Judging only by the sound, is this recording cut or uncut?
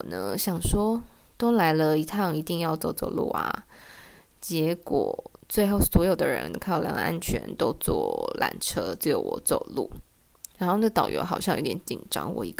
uncut